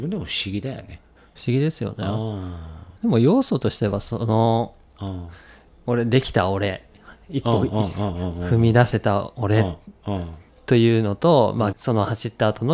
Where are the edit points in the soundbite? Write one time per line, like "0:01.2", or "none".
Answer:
0:03.0
0:11.7